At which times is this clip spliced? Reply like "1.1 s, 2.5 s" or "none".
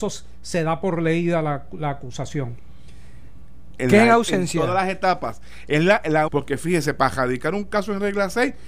3.7 s, 6.3 s